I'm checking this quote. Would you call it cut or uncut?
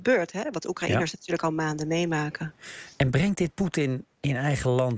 uncut